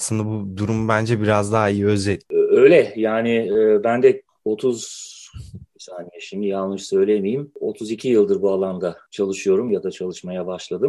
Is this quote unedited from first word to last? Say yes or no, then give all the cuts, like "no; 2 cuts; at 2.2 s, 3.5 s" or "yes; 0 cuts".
yes; 0 cuts